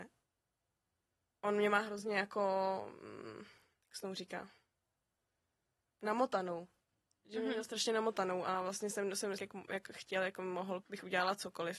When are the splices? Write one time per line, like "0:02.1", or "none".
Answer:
0:09.4
0:10.8